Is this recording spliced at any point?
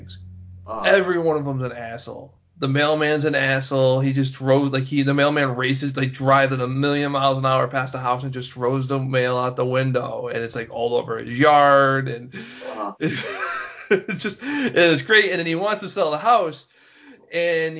no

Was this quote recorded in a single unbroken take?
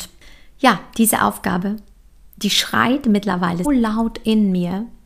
no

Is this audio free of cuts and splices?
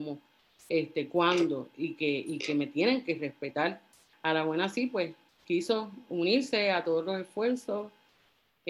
no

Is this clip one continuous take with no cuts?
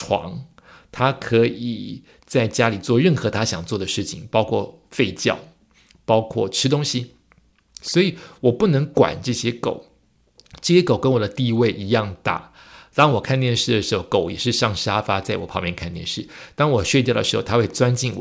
yes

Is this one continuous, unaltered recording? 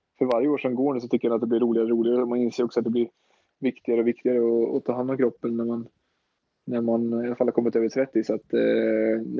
yes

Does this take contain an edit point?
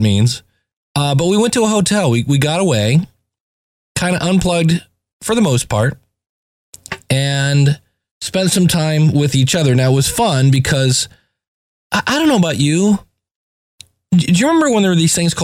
no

